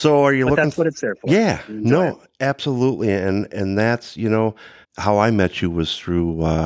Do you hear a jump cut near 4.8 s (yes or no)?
yes